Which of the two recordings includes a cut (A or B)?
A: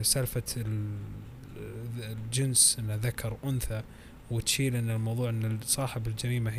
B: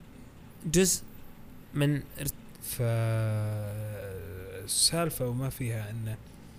B